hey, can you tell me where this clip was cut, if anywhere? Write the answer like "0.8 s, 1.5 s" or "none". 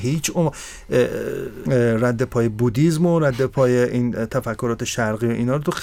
1.7 s